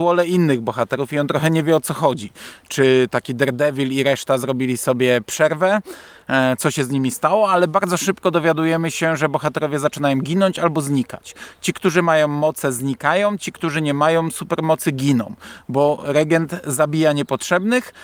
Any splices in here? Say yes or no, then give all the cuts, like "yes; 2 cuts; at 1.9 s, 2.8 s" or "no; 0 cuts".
no; 0 cuts